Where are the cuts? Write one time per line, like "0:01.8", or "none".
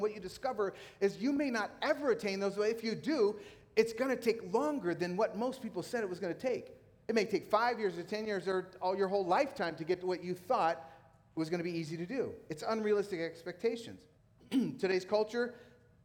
0:14.1